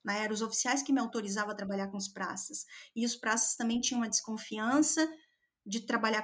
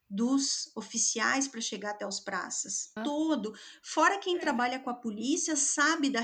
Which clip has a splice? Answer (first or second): second